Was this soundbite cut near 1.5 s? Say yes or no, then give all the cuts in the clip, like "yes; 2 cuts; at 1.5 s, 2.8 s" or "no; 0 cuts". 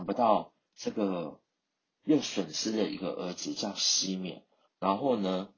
no; 1 cut; at 4.6 s